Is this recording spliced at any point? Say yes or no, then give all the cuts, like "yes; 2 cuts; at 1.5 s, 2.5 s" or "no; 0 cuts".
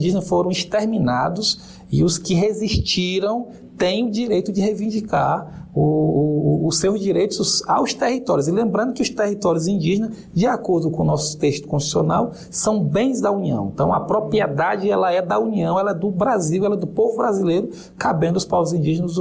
no; 0 cuts